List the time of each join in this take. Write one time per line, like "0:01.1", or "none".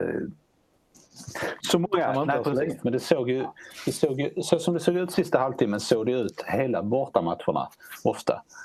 0:01.6
0:02.8